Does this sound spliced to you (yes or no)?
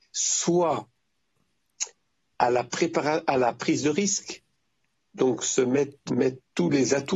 yes